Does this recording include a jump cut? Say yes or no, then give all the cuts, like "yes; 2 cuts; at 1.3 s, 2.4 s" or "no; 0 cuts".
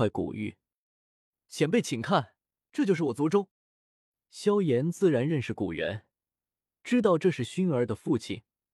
yes; 1 cut; at 3.5 s